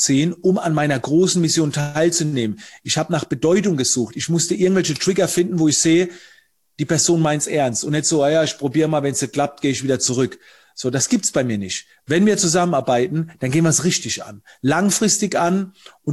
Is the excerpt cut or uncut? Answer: uncut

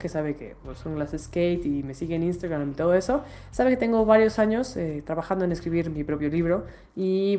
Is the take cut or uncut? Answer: uncut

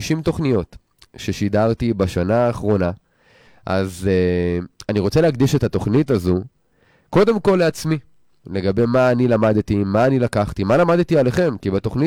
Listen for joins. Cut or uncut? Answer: cut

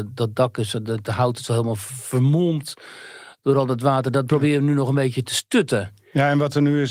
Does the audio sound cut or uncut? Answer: uncut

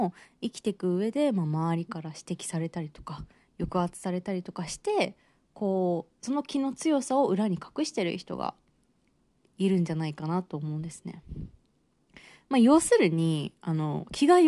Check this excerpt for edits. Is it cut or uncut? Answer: uncut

